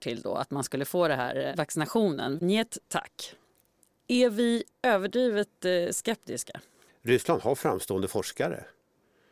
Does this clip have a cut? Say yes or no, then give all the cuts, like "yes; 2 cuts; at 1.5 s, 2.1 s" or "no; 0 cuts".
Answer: yes; 2 cuts; at 2.4 s, 6.9 s